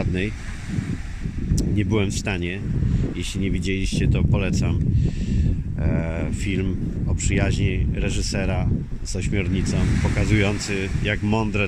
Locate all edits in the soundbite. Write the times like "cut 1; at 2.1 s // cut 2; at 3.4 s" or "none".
none

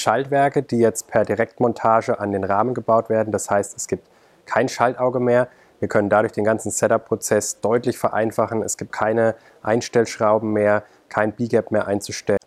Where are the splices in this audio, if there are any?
cut 1; at 8.9 s

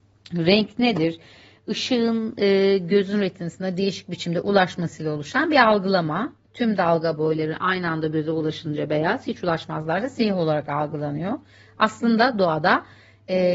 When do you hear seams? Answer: none

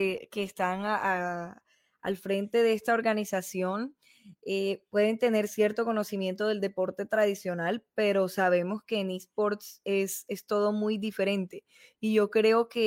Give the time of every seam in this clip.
none

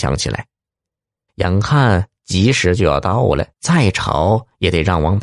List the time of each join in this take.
cut 1; at 1.3 s // cut 2; at 3.5 s

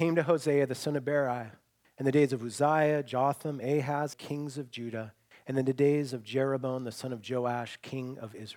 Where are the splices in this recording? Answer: cut 1; at 4.1 s

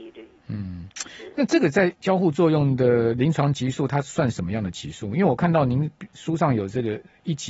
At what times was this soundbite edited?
none

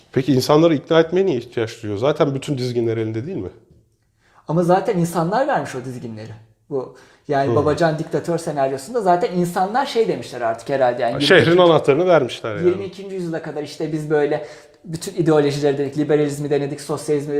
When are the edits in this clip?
none

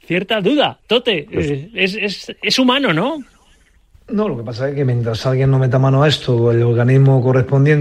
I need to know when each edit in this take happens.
cut 1; at 3.9 s

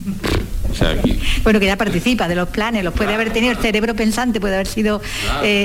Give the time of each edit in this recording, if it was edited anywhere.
none

